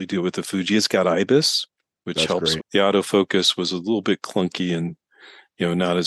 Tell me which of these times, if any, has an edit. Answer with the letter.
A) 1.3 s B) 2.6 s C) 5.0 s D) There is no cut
B